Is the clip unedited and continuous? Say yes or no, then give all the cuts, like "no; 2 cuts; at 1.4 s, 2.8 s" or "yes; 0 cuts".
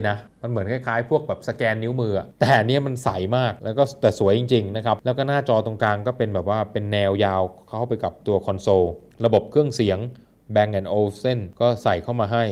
yes; 0 cuts